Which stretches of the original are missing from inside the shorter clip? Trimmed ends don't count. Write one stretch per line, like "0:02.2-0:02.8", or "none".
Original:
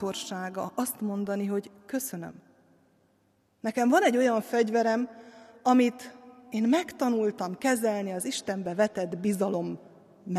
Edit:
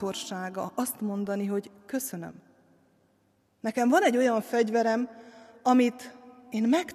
none